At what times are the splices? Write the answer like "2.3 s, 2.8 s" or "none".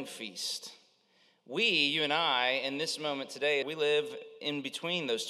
3.6 s